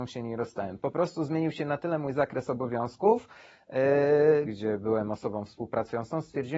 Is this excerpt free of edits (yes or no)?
no